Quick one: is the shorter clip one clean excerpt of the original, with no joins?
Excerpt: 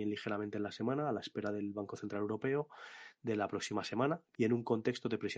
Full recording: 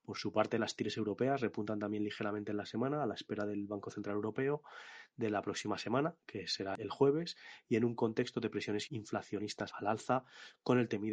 no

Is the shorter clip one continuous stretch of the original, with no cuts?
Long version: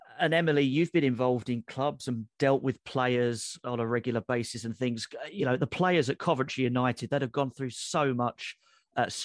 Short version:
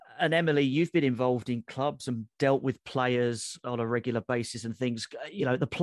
yes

